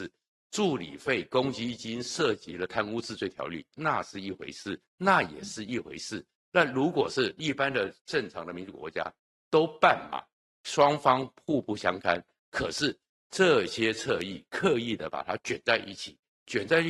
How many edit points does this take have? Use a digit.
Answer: 1